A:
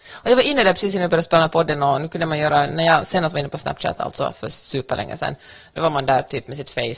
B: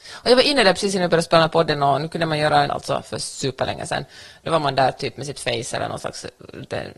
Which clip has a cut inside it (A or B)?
B